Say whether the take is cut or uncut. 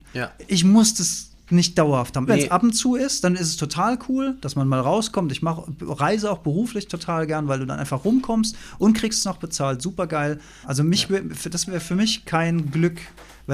cut